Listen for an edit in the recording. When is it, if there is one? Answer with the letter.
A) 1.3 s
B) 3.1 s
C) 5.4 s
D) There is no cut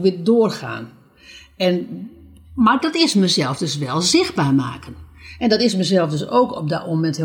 D